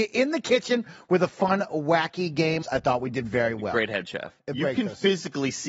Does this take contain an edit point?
yes; 2 cuts; at 2.6 s, 4.4 s

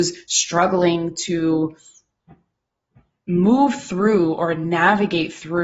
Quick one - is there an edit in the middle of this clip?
no; 0 cuts

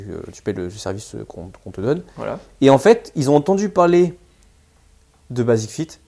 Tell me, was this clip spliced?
no; 0 cuts

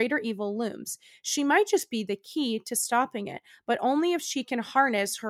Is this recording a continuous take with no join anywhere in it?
yes; 0 cuts

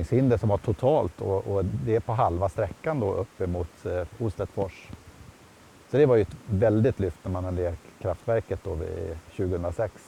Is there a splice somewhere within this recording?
no; 0 cuts

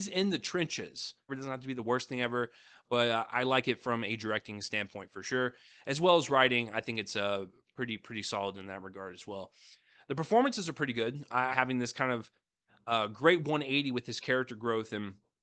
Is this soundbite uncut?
no; 2 cuts; at 1.3 s, 11.5 s

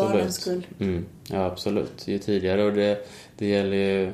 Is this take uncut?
yes; 0 cuts

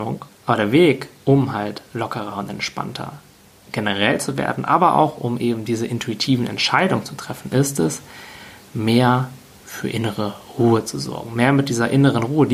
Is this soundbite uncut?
yes; 0 cuts

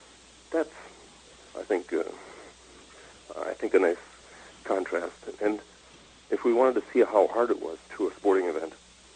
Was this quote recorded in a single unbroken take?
no; 1 cut; at 7.9 s

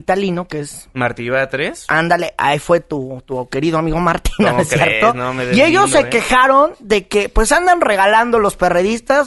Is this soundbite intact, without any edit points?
yes; 0 cuts

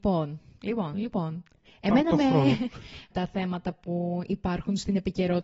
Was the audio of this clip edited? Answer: yes; 2 cuts; at 0.9 s, 3.1 s

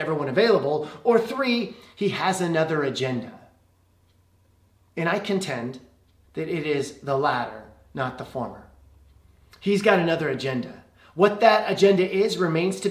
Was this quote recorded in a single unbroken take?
yes; 0 cuts

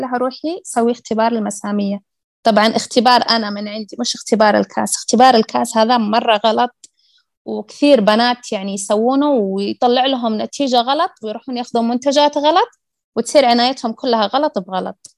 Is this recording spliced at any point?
no; 0 cuts

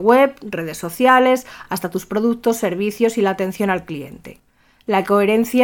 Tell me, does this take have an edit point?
no; 0 cuts

